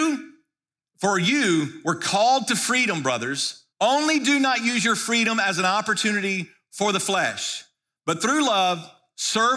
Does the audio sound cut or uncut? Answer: cut